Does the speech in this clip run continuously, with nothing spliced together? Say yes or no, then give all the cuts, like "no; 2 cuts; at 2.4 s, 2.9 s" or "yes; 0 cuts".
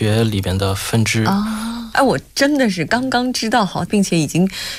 no; 2 cuts; at 1.9 s, 3.9 s